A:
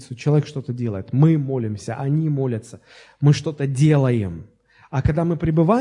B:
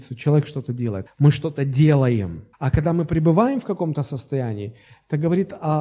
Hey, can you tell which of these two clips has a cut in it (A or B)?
B